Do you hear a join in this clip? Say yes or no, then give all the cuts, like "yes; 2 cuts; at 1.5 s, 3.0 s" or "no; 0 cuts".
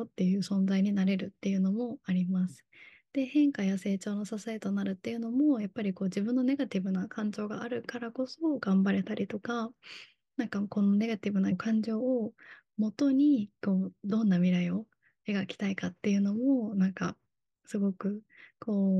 yes; 1 cut; at 11.5 s